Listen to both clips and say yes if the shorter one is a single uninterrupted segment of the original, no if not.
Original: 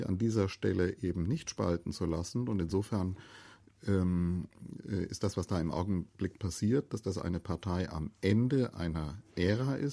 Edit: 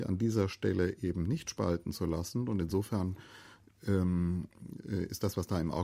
yes